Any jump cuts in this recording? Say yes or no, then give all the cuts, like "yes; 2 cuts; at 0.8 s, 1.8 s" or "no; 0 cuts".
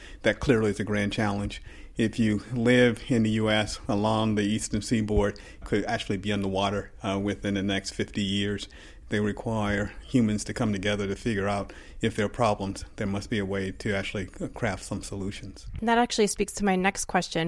yes; 2 cuts; at 5.6 s, 9.0 s